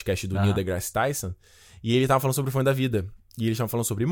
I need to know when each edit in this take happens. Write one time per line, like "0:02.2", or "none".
none